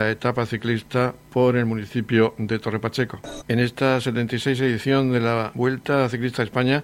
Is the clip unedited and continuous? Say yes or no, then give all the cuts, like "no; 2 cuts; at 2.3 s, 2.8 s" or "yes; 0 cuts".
no; 1 cut; at 3.4 s